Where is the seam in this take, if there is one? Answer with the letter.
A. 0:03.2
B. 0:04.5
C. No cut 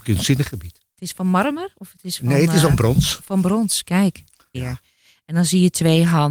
B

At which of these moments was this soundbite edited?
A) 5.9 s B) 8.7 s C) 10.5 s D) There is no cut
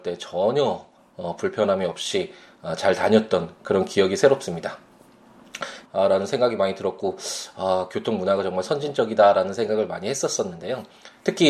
A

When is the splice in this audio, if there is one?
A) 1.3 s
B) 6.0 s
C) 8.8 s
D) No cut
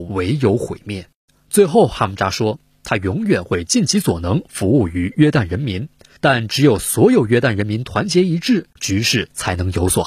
C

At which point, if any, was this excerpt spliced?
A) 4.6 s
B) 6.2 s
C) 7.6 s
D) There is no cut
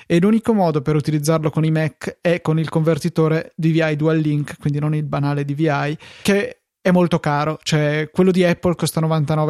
B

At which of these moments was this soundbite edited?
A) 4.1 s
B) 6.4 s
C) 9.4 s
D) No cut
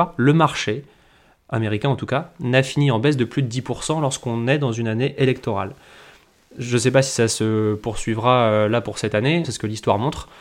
C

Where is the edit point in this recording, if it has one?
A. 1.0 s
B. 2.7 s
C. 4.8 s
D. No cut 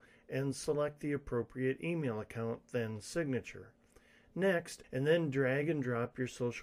C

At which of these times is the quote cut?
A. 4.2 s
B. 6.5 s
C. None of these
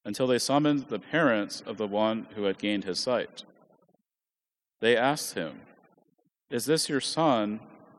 B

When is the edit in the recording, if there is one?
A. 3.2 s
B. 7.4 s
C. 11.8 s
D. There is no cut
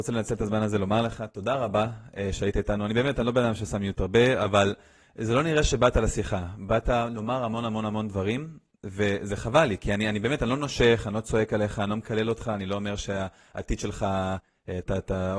D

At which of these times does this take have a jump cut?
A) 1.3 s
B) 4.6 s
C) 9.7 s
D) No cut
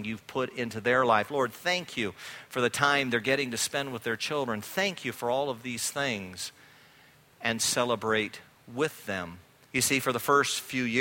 C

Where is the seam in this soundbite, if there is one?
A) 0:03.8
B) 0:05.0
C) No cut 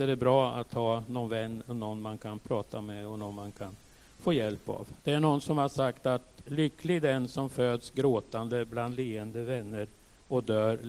B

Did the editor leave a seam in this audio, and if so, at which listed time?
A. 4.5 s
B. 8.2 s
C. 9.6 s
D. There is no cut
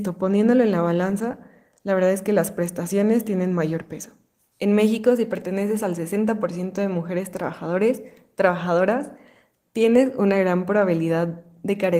A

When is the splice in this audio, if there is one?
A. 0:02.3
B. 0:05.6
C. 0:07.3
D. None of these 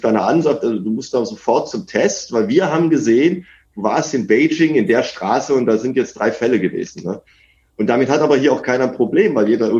D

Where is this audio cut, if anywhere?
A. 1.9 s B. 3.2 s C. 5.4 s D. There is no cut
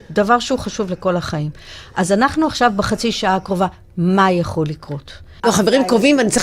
C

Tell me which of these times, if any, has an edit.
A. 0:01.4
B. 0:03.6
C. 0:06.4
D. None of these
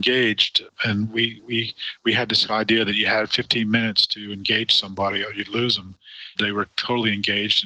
C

